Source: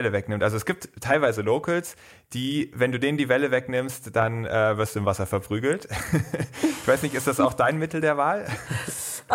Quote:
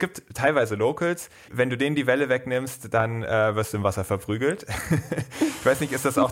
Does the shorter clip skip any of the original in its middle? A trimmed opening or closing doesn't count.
yes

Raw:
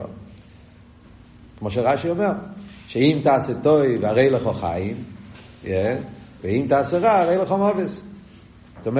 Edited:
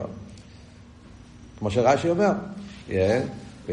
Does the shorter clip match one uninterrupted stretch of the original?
no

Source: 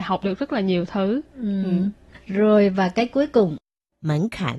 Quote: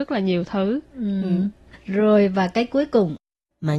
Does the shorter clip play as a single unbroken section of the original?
yes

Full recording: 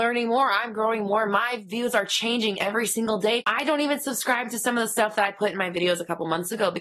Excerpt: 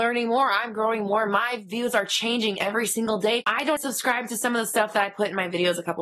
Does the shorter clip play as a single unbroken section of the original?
no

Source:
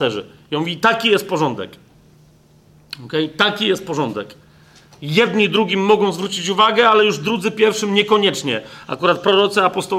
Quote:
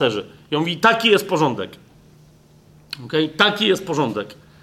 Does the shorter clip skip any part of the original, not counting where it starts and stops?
no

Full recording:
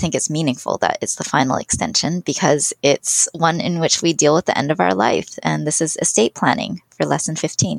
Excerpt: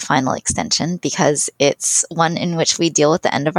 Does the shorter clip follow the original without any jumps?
yes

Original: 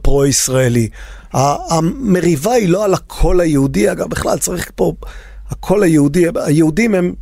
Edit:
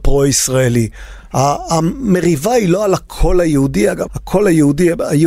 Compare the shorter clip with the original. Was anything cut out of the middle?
yes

